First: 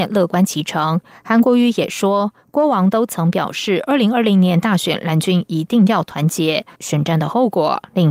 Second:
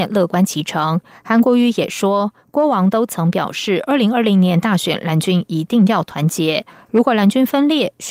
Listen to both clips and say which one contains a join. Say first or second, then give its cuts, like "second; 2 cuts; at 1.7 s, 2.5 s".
first; 1 cut; at 6.7 s